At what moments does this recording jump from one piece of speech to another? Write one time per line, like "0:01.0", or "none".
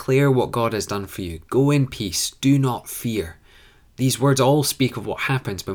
none